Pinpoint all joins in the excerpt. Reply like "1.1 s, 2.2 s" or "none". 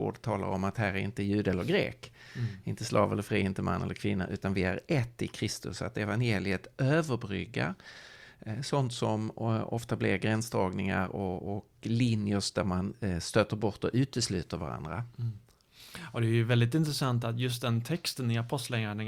none